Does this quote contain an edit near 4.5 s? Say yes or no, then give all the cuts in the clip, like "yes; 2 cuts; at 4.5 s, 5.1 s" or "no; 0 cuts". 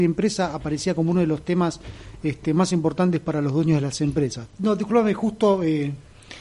yes; 1 cut; at 4.5 s